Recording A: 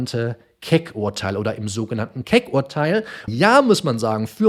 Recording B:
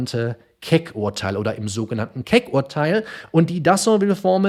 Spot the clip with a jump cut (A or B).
A